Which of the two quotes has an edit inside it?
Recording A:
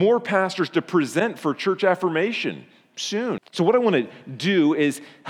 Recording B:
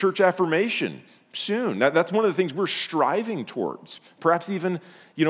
A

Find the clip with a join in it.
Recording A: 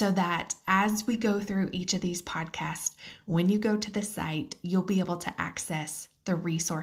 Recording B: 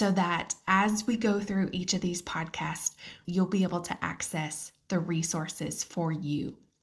B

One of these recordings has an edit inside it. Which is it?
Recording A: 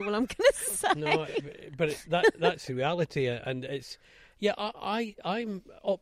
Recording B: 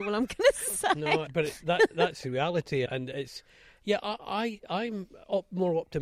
B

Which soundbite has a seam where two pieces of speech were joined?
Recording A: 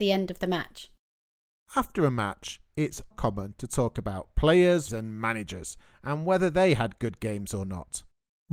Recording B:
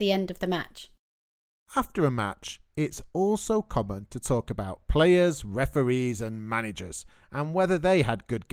A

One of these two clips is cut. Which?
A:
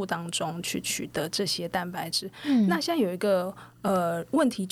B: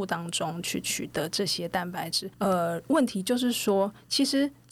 B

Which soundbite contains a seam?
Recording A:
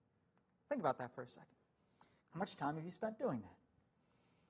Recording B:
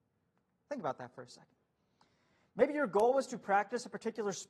A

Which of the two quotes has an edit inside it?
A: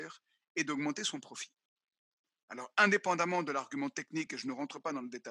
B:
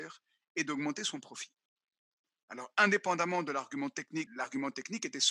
B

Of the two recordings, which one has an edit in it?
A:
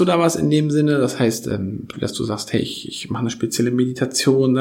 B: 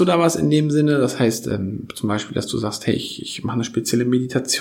A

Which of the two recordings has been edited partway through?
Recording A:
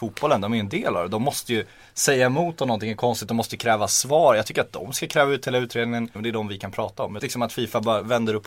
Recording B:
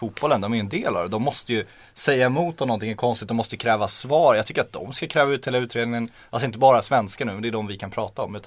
A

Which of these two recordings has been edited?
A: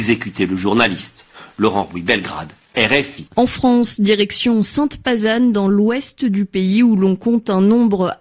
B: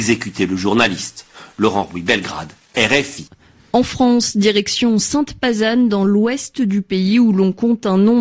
A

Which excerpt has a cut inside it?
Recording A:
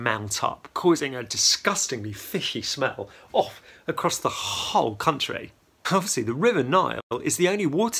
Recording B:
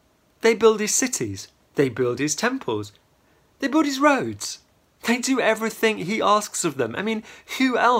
A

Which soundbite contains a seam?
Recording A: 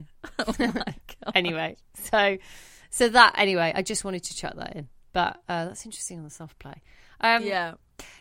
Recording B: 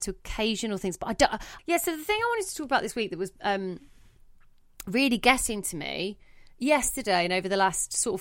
B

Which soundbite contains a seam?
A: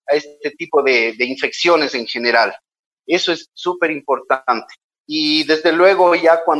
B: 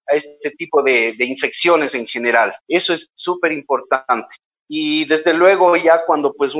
B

